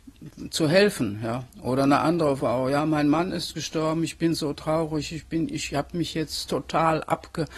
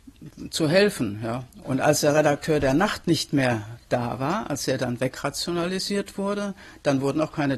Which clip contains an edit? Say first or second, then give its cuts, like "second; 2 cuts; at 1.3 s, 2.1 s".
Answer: second; 1 cut; at 1.6 s